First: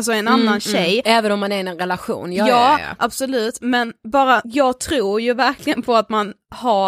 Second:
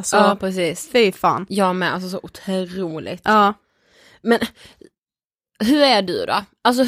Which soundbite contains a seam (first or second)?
first